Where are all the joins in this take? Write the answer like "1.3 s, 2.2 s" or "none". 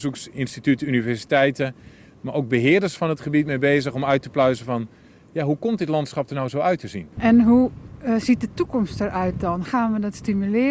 7.1 s, 9.7 s